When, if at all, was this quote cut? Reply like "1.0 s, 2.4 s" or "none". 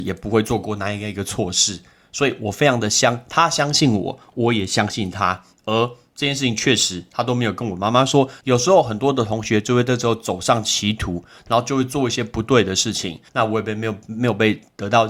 8.4 s, 13.3 s